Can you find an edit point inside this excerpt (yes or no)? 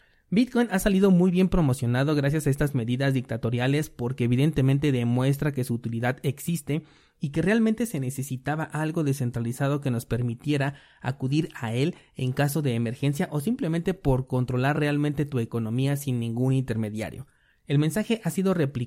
no